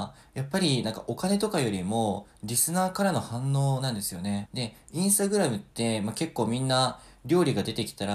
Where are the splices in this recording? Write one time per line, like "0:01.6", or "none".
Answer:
0:04.5